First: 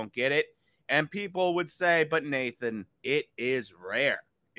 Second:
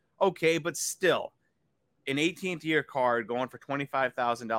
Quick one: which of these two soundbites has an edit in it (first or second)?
first